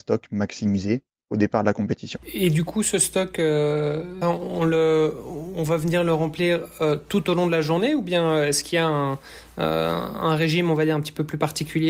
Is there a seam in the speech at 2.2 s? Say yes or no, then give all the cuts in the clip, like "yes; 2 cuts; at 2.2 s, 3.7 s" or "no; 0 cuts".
no; 1 cut; at 4.2 s